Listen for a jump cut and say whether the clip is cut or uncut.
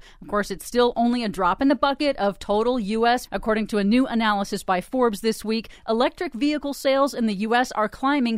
cut